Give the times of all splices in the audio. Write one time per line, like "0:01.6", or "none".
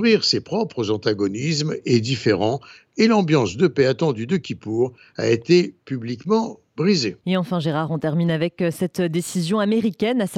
0:07.2